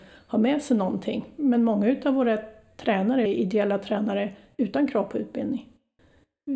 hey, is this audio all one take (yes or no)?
no